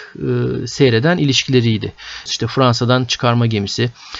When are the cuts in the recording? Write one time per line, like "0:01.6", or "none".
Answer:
0:02.3